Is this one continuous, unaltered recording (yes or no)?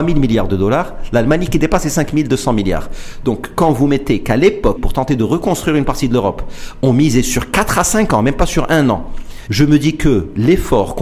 no